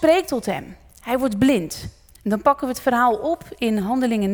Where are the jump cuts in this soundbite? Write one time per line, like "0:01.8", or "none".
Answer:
none

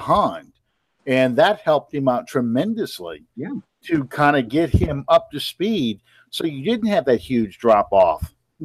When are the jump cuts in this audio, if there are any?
none

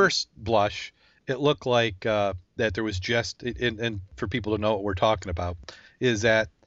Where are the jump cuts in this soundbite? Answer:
none

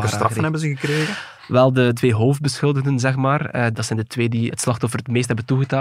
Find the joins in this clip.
none

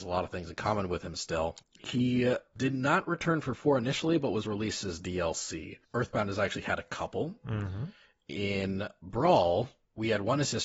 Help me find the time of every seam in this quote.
0:01.6
0:05.8

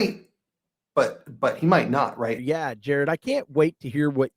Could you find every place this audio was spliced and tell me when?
0:02.4

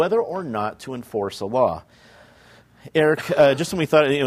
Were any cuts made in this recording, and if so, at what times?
none

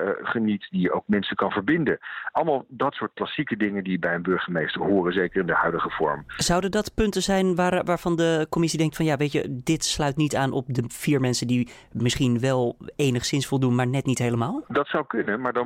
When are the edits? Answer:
none

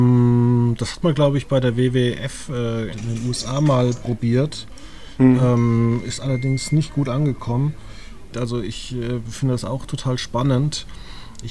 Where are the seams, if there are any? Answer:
0:02.9
0:08.3

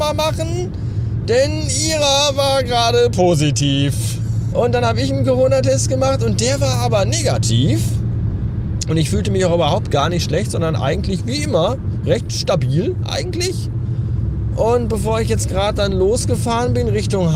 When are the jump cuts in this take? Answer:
0:04.5

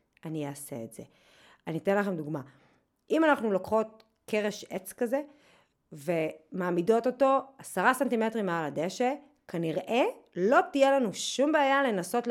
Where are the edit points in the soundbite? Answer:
none

